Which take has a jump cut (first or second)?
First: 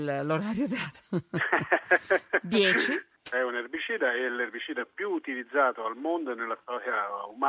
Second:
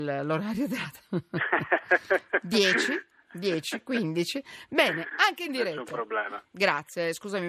first